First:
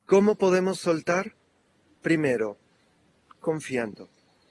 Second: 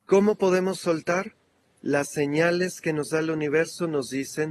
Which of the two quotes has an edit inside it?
second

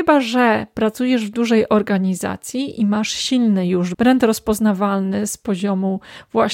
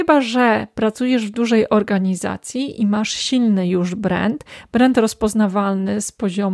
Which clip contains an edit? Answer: first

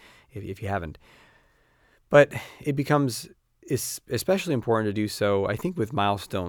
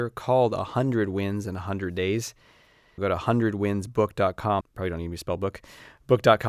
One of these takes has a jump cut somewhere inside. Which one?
second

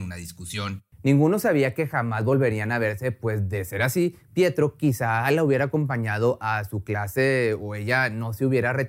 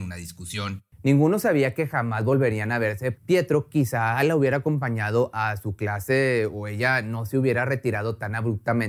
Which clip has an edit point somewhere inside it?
second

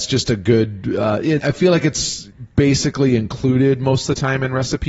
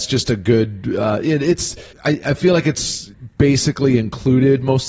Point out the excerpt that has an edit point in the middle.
first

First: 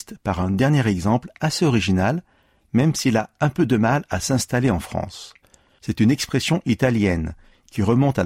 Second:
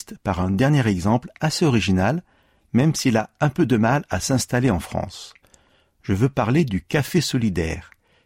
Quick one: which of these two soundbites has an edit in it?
first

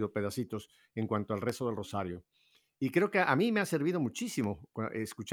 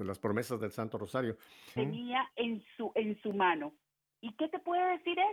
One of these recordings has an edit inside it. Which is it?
second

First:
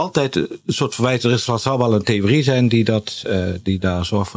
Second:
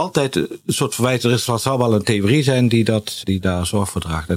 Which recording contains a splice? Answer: second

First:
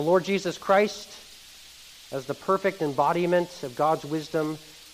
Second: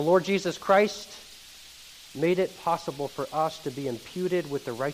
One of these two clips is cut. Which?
second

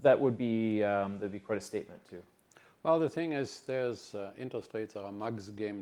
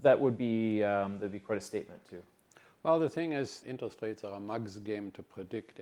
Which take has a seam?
second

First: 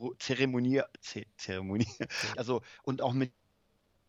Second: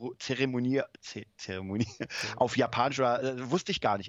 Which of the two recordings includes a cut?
first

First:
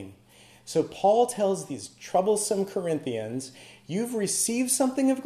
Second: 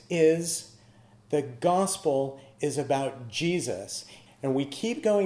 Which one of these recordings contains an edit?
second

